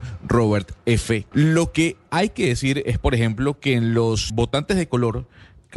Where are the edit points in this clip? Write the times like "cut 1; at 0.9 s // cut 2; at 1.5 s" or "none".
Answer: cut 1; at 1.3 s // cut 2; at 4.3 s